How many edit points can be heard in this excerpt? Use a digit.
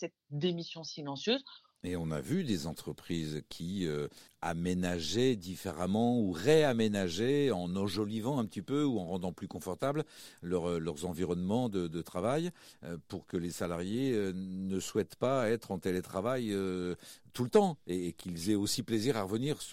1